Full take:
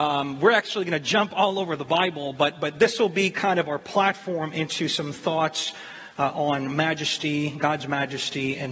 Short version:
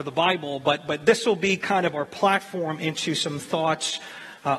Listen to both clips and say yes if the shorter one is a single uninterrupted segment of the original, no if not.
yes